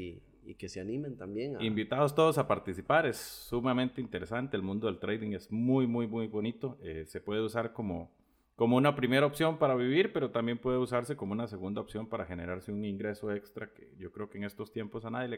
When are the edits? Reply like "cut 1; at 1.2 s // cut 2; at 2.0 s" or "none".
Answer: none